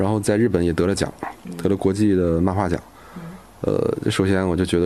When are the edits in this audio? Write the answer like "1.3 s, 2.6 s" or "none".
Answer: none